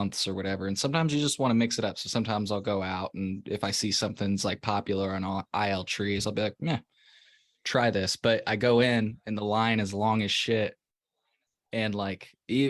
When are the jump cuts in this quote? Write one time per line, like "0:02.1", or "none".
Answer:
none